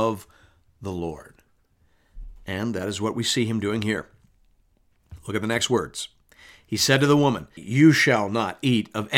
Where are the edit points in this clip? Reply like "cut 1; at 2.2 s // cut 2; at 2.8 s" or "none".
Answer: cut 1; at 7.6 s

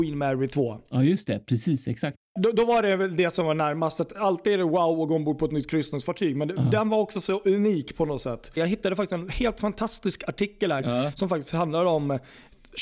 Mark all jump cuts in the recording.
cut 1; at 8.6 s // cut 2; at 10.8 s

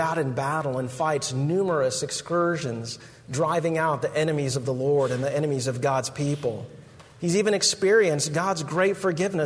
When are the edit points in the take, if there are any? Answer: none

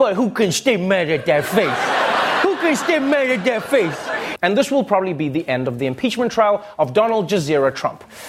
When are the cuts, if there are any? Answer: cut 1; at 4.4 s

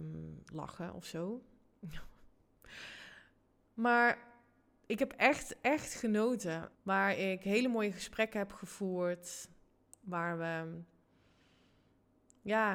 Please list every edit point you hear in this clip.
cut 1; at 6.7 s

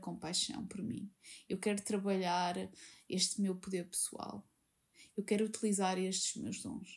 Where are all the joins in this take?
cut 1; at 5.1 s

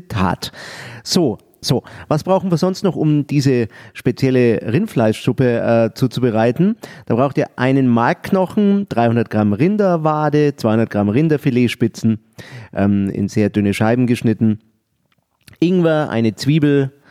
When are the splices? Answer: cut 1; at 1.6 s

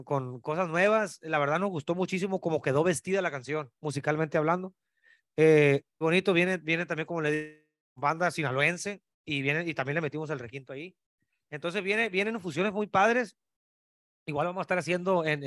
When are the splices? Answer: cut 1; at 6.0 s

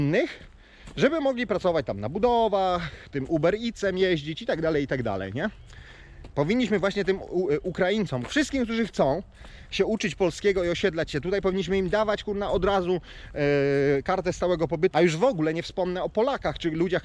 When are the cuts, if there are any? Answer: cut 1; at 6.3 s // cut 2; at 14.9 s

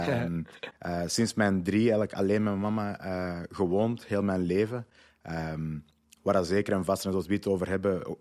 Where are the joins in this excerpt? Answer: none

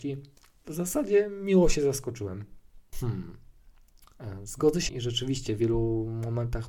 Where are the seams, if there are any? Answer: cut 1; at 2.9 s // cut 2; at 4.9 s

